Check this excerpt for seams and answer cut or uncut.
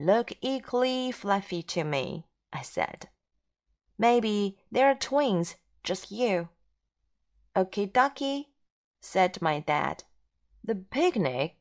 cut